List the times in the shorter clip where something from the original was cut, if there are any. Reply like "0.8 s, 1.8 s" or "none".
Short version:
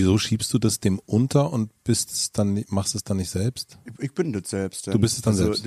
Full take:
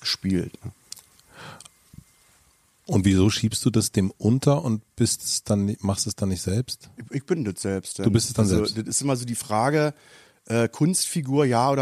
none